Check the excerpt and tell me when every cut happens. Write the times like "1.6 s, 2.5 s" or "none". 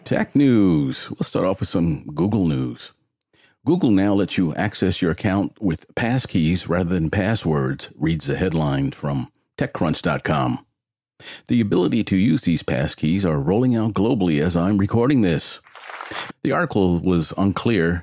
16.3 s